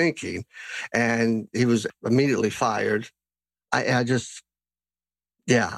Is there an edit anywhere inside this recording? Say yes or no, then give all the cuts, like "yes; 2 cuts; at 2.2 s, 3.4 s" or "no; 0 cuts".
no; 0 cuts